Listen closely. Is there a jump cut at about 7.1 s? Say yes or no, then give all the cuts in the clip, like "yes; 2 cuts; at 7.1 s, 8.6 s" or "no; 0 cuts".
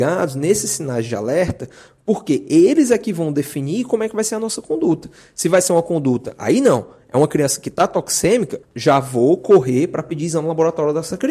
no; 1 cut; at 8.6 s